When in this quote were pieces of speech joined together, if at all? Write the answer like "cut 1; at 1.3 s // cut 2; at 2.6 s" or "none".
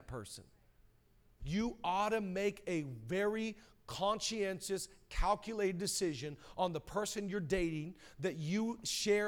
cut 1; at 1.4 s